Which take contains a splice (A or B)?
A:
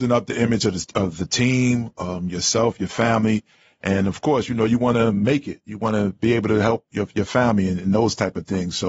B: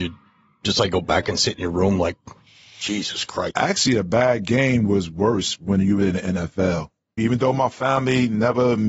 B